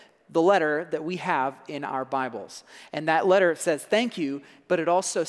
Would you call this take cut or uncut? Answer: uncut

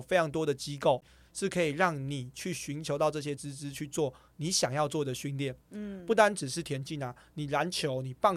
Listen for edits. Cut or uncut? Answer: uncut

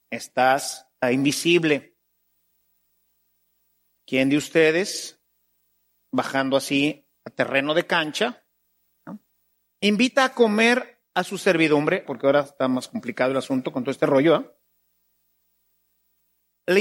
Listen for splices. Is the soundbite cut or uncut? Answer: cut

